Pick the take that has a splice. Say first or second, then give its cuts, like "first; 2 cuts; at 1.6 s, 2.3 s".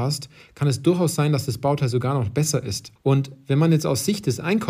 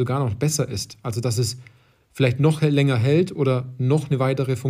first; 1 cut; at 3.0 s